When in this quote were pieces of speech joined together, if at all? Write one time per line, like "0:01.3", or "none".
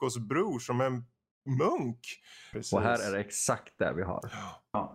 0:02.5